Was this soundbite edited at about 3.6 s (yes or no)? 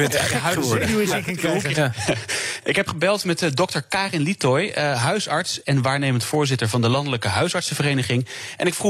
no